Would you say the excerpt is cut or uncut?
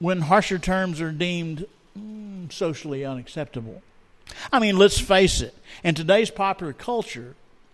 uncut